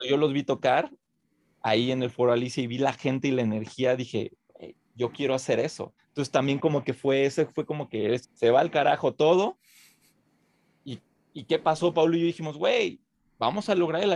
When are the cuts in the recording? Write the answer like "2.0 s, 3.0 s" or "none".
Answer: 6.0 s, 8.2 s